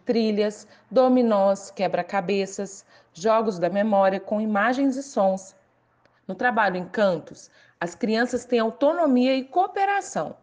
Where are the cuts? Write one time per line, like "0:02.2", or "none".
0:06.2